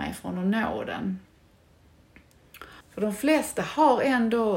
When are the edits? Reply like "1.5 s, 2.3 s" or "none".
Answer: 2.8 s